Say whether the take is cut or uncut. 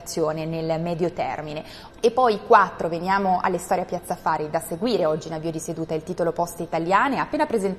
cut